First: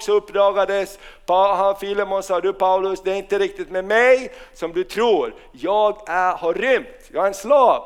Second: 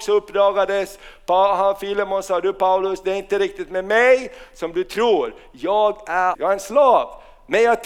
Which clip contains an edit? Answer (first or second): second